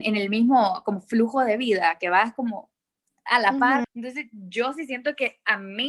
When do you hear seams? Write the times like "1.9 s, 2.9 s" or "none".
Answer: 3.8 s